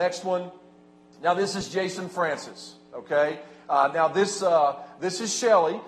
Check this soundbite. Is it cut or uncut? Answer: uncut